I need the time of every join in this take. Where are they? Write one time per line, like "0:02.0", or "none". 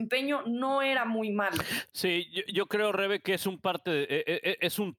none